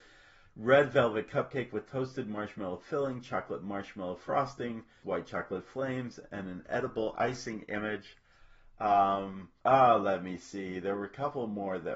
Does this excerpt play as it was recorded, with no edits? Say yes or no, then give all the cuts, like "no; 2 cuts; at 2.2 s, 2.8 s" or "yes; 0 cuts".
no; 2 cuts; at 5.0 s, 9.6 s